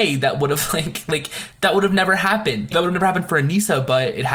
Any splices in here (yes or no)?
yes